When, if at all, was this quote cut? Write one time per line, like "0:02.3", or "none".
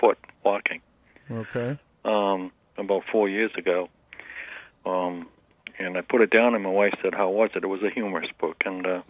0:02.6